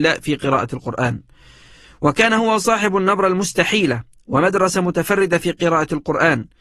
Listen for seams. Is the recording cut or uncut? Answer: uncut